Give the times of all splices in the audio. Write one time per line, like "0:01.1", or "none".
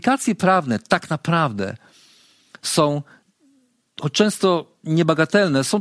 none